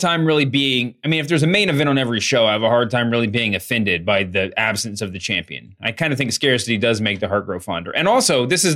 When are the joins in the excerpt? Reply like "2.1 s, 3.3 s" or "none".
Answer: none